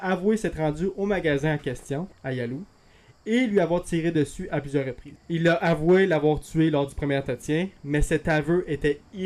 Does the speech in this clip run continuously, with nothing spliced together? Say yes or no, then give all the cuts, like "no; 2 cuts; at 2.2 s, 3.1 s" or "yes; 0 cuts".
no; 2 cuts; at 2.1 s, 5.2 s